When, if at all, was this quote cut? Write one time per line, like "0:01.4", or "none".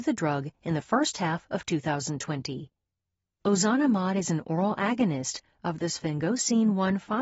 none